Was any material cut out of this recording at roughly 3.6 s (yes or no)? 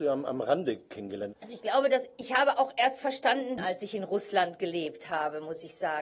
yes